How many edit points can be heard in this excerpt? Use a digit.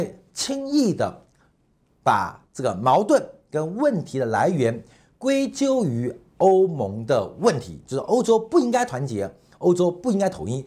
0